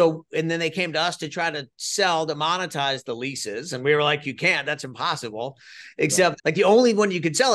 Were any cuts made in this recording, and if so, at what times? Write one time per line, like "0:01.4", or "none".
0:06.4